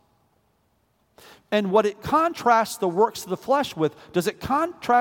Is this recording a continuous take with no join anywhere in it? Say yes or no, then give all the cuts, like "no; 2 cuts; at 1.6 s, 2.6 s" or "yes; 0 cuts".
yes; 0 cuts